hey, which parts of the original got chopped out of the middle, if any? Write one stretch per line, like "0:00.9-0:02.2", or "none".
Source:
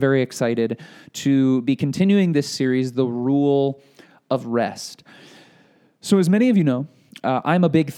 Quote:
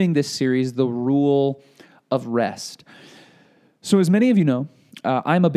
none